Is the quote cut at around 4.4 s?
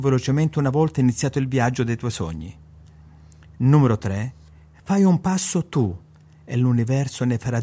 no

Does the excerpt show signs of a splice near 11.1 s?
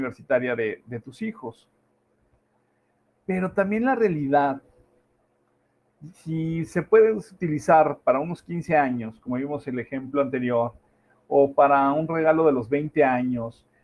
no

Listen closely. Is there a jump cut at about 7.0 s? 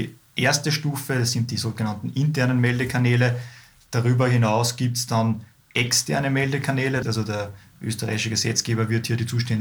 yes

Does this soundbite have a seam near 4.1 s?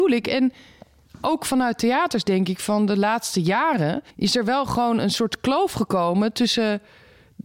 yes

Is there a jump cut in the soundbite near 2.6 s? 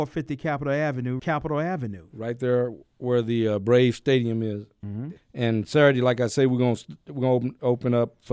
no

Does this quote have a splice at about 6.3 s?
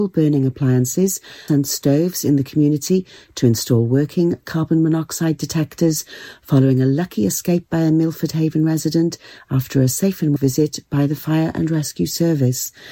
no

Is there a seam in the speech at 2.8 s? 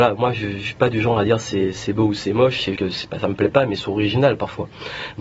yes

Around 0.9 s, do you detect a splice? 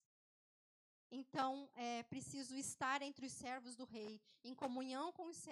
yes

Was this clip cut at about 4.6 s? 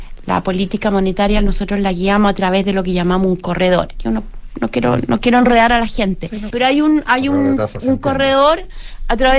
no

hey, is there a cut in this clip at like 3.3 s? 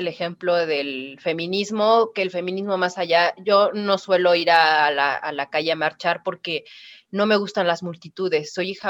no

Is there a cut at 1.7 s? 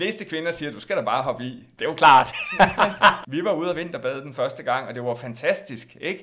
no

